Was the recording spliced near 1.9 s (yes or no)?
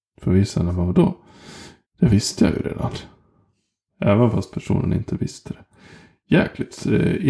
no